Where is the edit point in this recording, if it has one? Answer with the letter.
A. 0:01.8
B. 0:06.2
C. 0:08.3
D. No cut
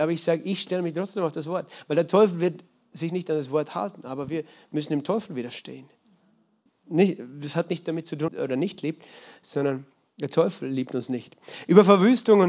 C